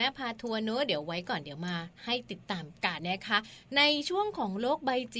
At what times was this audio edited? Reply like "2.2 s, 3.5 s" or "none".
3.0 s

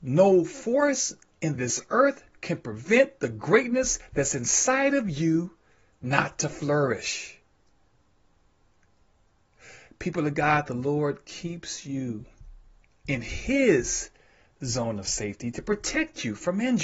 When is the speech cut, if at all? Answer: none

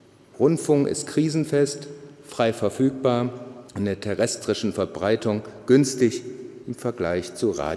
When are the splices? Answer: 3.7 s

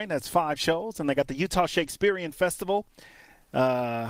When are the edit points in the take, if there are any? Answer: none

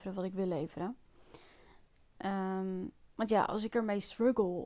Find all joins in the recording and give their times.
none

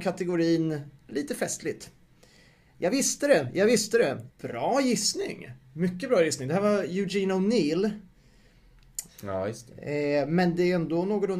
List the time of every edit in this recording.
4.3 s, 9.1 s

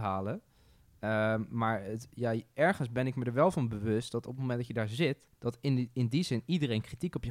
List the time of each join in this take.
5.3 s

